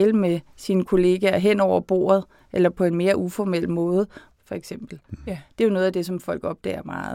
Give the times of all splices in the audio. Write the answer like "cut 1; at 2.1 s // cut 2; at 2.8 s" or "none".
cut 1; at 4.3 s

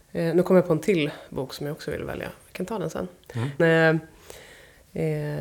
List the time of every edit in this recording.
cut 1; at 3.6 s

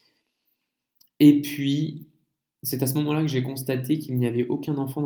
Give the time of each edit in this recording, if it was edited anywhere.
none

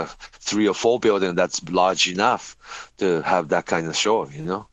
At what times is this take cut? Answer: none

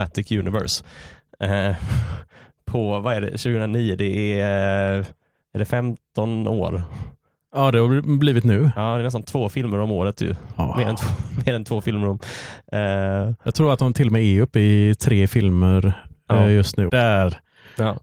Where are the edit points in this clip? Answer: cut 1; at 16.9 s

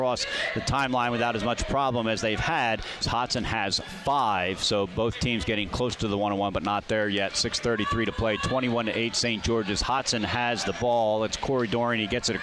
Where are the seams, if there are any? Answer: cut 1; at 3.0 s

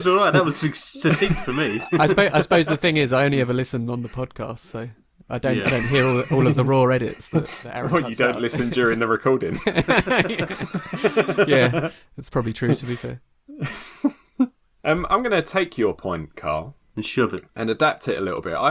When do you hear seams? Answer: none

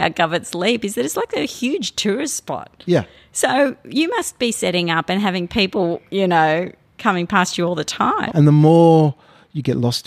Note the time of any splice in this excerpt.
cut 1; at 8.3 s

